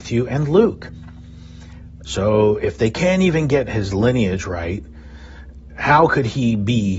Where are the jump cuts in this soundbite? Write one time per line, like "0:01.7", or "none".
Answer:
0:02.0
0:05.7